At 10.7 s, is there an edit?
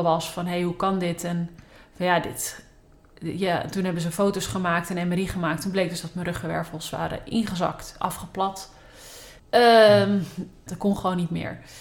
yes; 2 cuts; at 9.4 s, 10.7 s

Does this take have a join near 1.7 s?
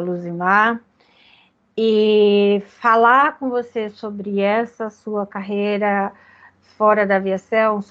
no; 0 cuts

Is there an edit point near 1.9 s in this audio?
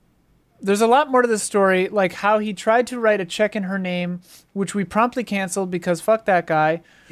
no; 0 cuts

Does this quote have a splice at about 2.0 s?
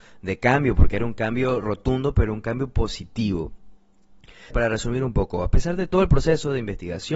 no; 1 cut; at 4.5 s

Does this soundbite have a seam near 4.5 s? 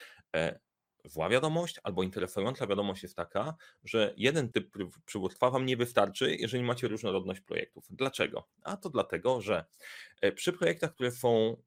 yes; 1 cut; at 4.5 s

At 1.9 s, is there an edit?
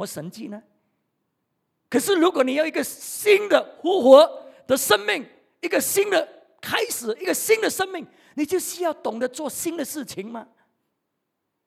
yes; 1 cut; at 1.9 s

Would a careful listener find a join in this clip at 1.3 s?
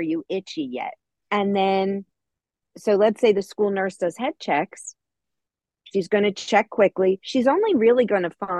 yes; 1 cut; at 1.3 s

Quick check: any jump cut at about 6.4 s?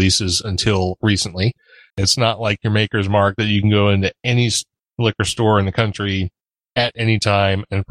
no; 1 cut; at 1.9 s

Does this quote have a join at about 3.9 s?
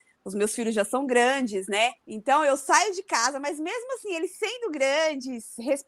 no; 1 cut; at 2.0 s

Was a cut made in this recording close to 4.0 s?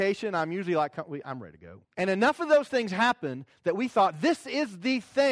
no; 1 cut; at 1.8 s

